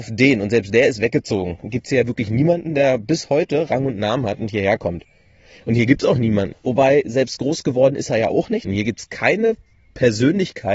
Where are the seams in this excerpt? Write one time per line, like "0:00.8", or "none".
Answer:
0:06.5
0:08.6